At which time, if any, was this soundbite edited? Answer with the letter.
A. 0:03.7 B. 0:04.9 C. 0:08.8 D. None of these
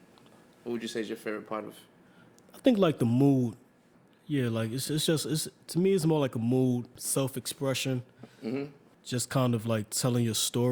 D